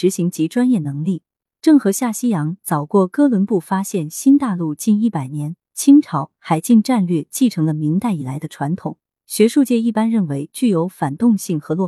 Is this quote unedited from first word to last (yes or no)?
no